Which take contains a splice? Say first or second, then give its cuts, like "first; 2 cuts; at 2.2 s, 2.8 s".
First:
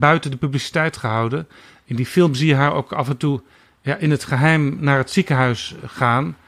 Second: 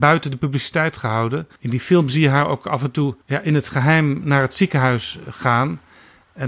second; 2 cuts; at 1.6 s, 3.2 s